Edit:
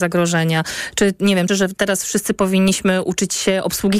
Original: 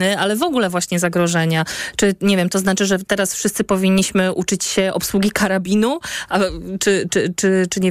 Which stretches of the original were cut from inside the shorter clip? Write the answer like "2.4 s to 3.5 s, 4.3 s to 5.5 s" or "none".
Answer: 2.5 s to 2.8 s